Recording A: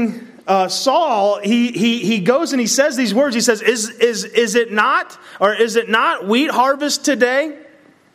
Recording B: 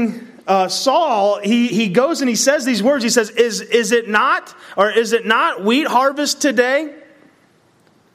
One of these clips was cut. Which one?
B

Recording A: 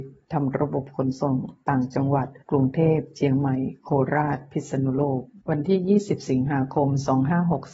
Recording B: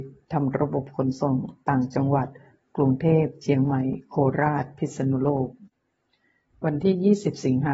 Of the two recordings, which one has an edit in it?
A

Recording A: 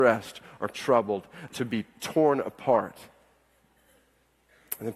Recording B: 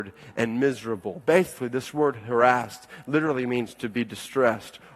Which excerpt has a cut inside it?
A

